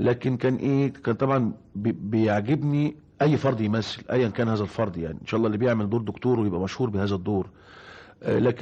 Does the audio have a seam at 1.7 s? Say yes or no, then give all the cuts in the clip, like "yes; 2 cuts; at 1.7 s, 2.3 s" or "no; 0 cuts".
yes; 1 cut; at 1.7 s